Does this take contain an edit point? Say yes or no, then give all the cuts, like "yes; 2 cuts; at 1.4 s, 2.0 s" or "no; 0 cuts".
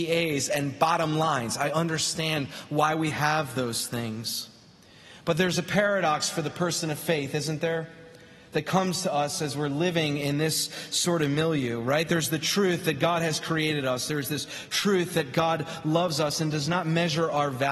no; 0 cuts